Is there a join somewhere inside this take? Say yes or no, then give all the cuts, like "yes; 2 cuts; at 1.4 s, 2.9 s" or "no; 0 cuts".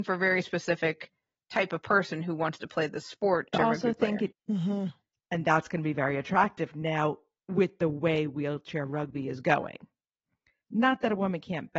yes; 1 cut; at 4.3 s